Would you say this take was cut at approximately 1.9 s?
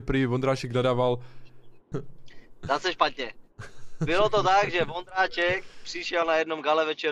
yes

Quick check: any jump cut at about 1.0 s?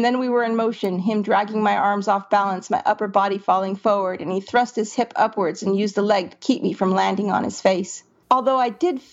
no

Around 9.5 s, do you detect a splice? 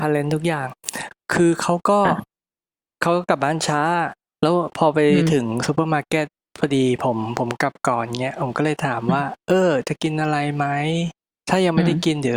no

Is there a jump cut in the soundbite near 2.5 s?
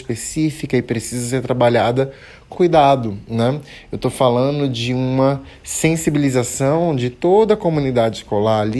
yes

